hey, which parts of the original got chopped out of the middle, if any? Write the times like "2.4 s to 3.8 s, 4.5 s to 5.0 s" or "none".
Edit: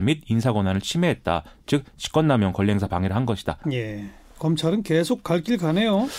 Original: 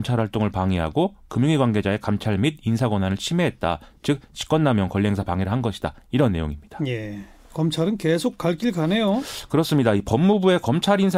6.0 s to 6.8 s